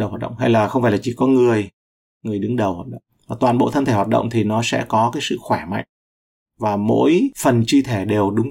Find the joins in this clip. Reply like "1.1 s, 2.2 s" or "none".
none